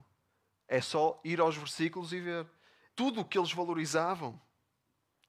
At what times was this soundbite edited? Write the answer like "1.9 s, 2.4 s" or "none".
2.9 s